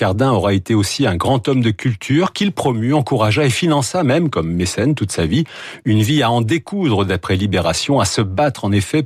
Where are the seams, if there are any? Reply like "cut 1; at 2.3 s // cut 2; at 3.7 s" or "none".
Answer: none